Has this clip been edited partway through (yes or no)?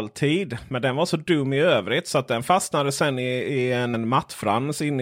yes